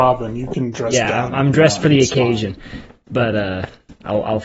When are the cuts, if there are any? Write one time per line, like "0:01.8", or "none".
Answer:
none